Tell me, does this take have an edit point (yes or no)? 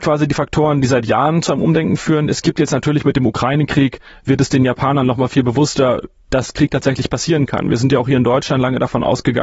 no